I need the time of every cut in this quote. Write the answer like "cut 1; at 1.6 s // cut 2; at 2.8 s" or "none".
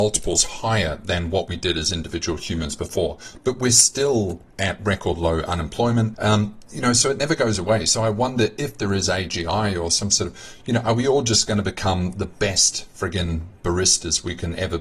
cut 1; at 6.1 s